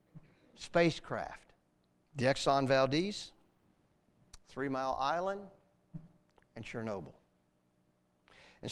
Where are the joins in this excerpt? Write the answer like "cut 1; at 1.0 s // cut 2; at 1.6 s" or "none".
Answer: cut 1; at 2.1 s